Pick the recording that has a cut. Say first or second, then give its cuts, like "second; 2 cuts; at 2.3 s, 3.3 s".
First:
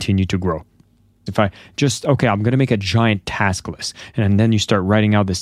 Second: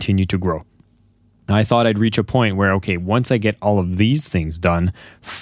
first; 1 cut; at 1.3 s